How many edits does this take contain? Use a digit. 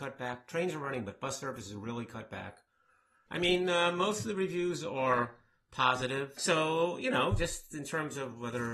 2